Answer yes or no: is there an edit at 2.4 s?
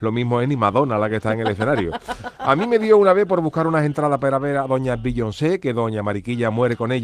no